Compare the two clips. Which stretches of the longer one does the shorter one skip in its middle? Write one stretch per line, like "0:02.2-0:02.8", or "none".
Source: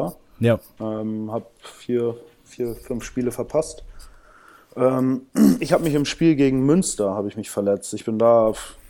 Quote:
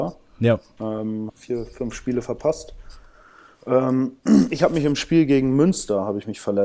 0:01.3-0:02.4